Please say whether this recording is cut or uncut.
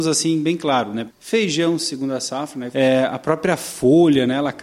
cut